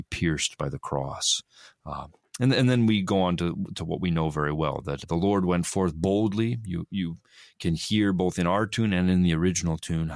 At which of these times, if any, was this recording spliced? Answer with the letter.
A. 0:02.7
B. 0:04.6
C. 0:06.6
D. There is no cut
D